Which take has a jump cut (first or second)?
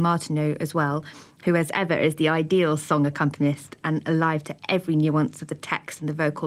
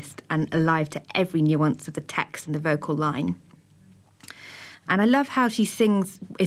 second